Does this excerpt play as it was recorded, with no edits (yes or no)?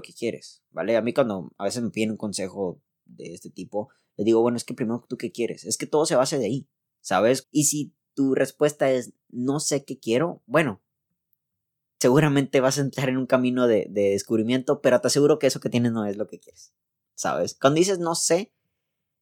no